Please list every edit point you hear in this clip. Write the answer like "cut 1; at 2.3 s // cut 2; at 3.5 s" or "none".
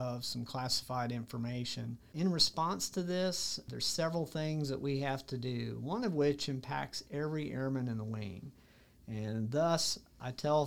cut 1; at 2.1 s